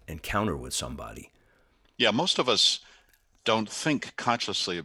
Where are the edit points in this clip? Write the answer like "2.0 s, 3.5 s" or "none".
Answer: none